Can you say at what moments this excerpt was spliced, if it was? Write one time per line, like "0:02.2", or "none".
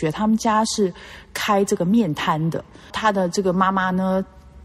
0:02.9